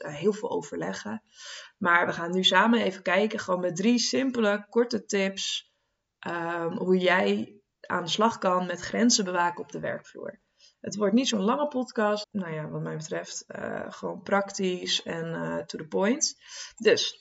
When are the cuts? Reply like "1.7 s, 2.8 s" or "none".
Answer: 12.2 s